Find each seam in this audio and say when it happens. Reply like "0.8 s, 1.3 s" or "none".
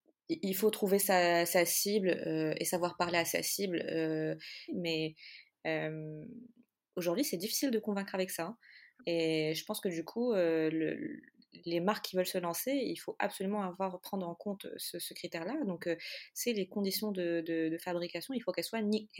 4.7 s